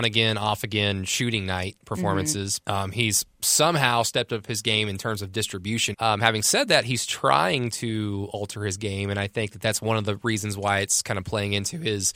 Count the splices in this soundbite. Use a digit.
2